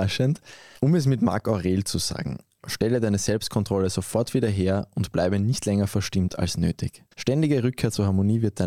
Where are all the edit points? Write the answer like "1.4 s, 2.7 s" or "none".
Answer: 2.6 s, 7.1 s